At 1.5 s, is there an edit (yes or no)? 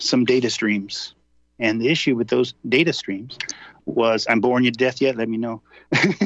no